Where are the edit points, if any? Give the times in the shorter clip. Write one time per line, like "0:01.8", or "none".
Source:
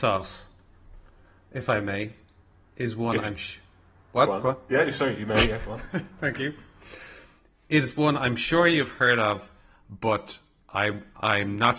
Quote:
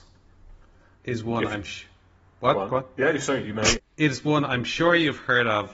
0:01.0
0:03.8